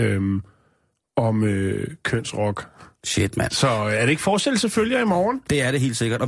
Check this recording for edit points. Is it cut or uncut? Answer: uncut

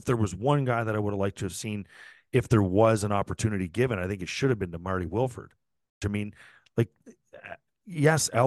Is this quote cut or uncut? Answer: cut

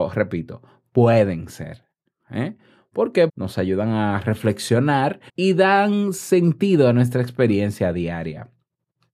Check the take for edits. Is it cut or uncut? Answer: cut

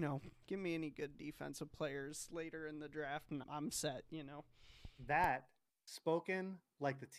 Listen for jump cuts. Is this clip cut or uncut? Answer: cut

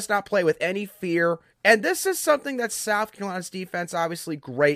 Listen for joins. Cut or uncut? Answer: cut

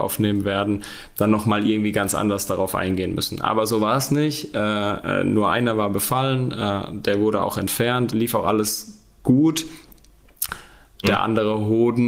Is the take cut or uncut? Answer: cut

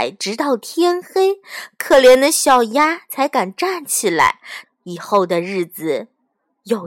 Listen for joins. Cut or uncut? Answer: cut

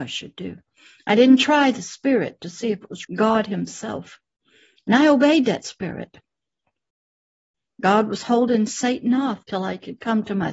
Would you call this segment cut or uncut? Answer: cut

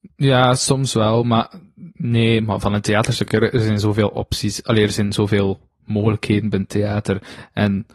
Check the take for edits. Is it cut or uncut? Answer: uncut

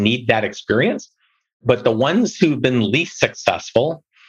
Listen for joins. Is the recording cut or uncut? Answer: uncut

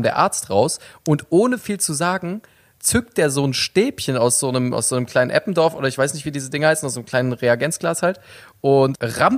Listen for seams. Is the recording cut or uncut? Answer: uncut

